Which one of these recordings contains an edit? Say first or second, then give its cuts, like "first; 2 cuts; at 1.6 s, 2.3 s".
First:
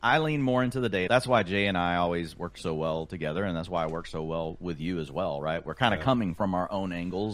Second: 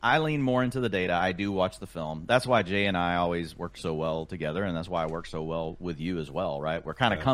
first; 1 cut; at 1.1 s